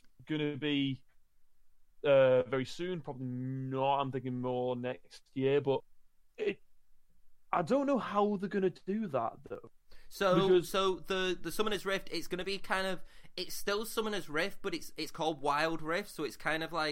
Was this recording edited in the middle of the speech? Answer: no; 0 cuts

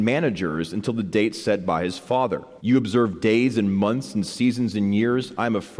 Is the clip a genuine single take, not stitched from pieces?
no; 1 cut; at 2.6 s

